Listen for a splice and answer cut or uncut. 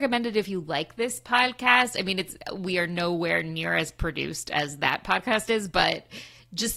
uncut